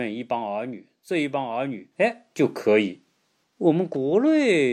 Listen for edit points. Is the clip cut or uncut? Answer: cut